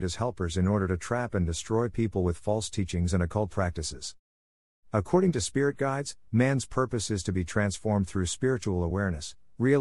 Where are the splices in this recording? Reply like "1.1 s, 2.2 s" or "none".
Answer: none